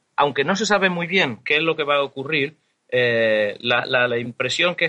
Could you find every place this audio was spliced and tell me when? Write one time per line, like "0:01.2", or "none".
none